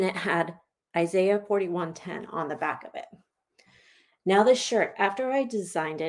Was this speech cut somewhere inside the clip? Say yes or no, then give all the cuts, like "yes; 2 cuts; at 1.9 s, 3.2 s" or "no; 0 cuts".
no; 0 cuts